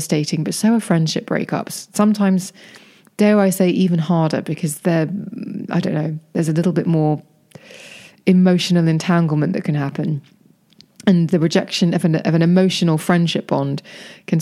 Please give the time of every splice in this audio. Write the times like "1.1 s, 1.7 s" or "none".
none